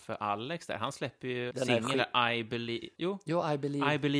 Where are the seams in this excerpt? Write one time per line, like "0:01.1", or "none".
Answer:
0:01.5
0:02.9